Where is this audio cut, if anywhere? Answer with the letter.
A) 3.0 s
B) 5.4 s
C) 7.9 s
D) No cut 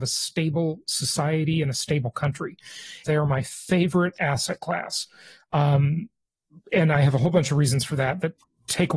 A